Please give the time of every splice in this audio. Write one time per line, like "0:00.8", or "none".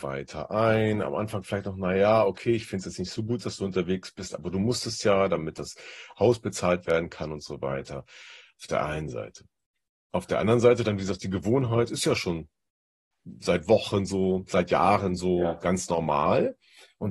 none